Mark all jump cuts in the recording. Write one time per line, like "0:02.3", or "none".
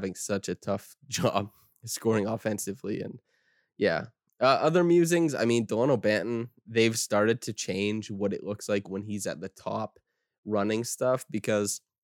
none